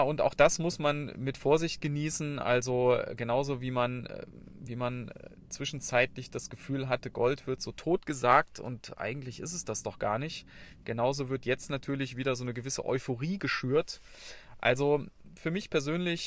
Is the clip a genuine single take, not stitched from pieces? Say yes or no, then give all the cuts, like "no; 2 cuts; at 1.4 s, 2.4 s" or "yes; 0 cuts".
yes; 0 cuts